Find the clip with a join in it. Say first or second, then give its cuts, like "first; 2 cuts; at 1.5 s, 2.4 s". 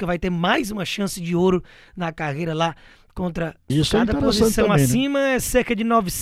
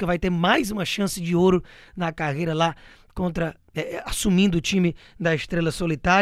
first; 1 cut; at 3.7 s